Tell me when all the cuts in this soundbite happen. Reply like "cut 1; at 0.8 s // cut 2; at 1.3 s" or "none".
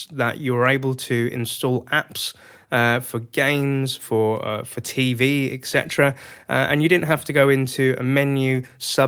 none

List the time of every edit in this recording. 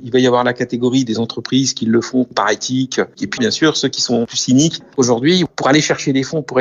cut 1; at 3.4 s // cut 2; at 4.9 s

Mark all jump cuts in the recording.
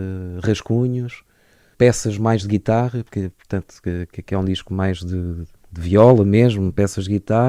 cut 1; at 1.7 s

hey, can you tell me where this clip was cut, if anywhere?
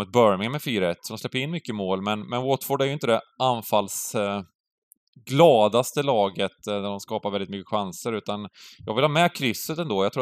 none

